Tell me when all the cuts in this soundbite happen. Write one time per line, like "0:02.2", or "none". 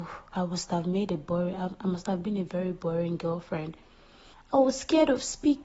0:04.3